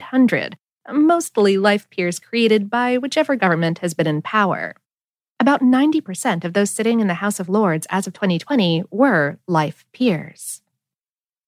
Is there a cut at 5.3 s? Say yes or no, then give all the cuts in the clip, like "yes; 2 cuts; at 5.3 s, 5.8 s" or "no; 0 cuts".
yes; 1 cut; at 5.3 s